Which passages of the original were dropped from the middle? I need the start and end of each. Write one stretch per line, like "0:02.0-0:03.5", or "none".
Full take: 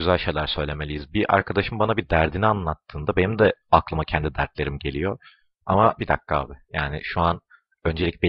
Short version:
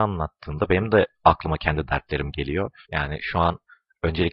0:05.3-0:06.7